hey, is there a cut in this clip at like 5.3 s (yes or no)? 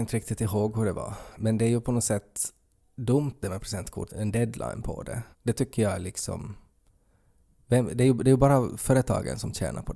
yes